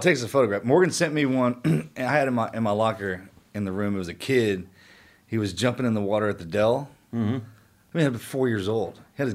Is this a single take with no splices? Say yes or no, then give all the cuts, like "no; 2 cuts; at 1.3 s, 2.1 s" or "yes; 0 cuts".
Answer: yes; 0 cuts